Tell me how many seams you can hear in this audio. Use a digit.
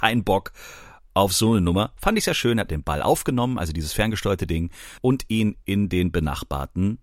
1